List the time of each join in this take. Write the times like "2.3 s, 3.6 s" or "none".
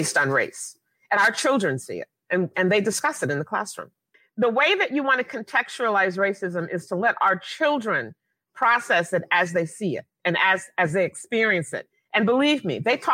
2.5 s